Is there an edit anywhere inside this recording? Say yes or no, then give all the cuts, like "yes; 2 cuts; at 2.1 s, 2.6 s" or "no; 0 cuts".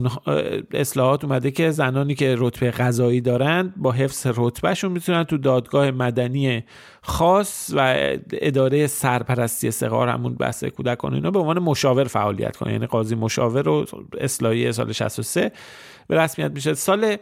no; 0 cuts